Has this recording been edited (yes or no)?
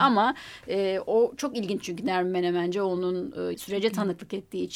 yes